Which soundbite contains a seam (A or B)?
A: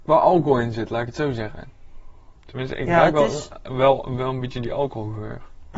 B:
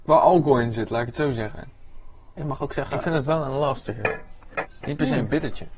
B